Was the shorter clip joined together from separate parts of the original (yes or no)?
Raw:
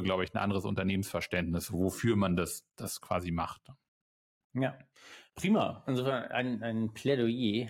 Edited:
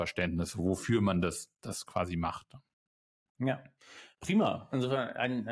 no